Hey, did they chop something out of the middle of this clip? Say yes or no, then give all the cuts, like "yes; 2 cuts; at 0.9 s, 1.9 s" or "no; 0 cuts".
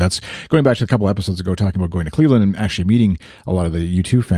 no; 0 cuts